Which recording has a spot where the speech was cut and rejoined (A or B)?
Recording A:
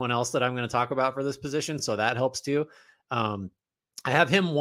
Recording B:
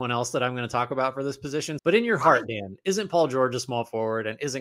B